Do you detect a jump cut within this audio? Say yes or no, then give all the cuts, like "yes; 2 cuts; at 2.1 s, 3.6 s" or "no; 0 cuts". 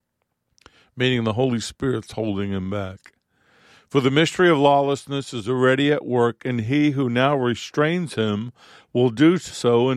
no; 0 cuts